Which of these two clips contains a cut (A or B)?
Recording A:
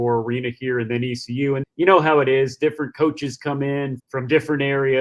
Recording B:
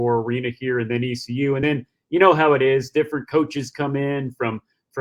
A